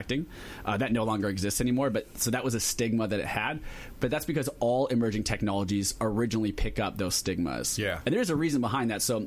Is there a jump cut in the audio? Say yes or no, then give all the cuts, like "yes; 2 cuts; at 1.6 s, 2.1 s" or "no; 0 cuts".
no; 0 cuts